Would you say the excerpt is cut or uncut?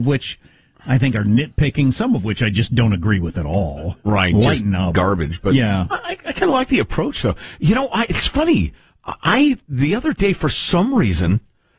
cut